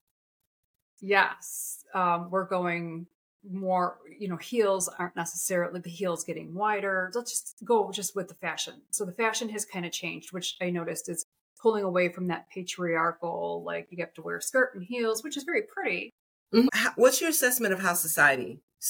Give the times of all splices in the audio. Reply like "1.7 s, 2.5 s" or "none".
16.7 s